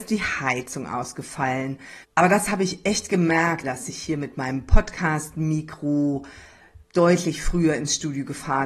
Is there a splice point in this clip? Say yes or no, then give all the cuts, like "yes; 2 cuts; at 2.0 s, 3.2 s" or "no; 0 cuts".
yes; 3 cuts; at 2.0 s, 3.6 s, 6.8 s